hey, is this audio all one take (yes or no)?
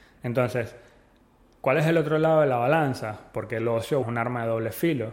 no